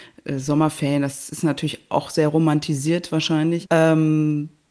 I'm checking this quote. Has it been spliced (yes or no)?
yes